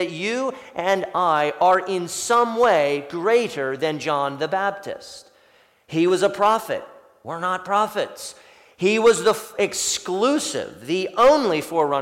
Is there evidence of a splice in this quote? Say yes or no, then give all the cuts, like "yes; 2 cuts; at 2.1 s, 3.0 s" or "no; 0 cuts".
no; 0 cuts